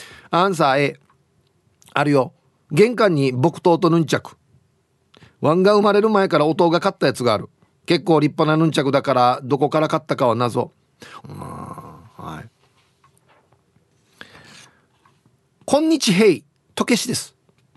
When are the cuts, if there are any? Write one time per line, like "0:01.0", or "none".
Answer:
0:11.2